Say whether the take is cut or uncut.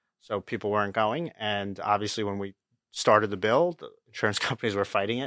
uncut